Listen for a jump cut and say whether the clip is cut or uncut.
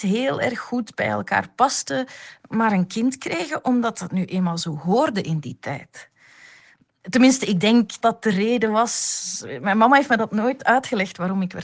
cut